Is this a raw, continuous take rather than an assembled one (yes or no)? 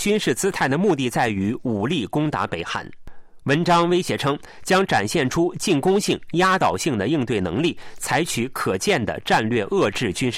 yes